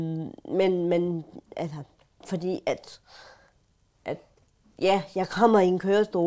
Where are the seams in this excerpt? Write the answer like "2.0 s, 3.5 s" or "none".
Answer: 2.2 s